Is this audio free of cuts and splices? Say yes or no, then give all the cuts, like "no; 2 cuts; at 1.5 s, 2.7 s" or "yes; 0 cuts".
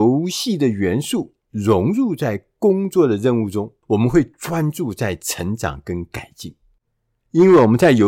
no; 1 cut; at 3.8 s